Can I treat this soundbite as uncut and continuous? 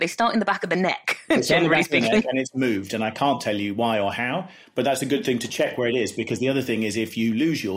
yes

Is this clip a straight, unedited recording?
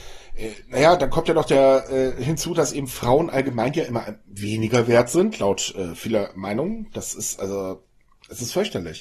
yes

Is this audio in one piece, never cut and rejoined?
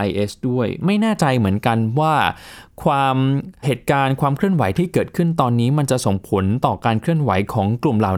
no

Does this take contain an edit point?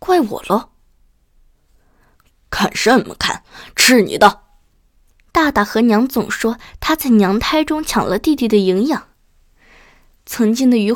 yes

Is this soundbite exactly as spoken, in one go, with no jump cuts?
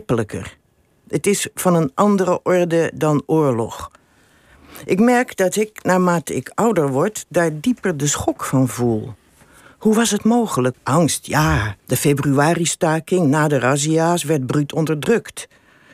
no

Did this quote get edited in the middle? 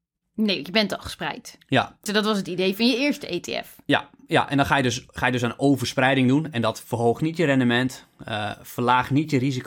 yes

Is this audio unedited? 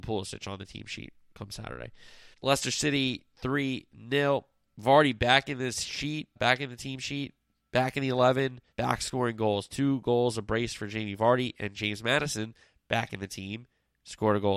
no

